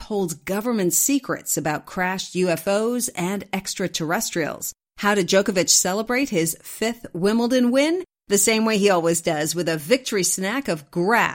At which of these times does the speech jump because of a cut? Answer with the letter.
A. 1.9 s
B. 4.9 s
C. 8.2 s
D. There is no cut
B